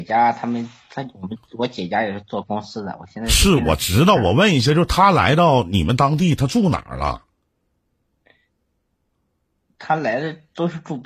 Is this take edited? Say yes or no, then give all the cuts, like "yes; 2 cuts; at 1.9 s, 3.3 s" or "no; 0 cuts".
no; 0 cuts